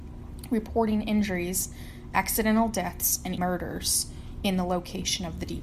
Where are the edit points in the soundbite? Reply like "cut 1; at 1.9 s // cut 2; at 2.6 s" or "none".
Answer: cut 1; at 3.4 s